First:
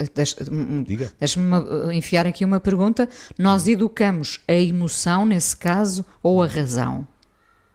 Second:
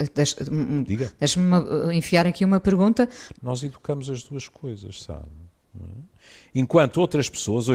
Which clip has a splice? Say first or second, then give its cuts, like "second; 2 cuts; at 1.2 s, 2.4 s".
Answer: second; 2 cuts; at 3.3 s, 5.6 s